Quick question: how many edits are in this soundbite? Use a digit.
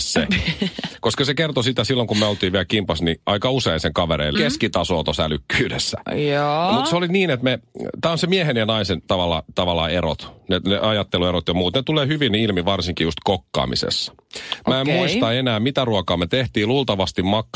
1